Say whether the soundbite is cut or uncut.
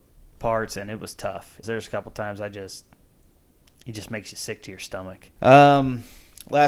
cut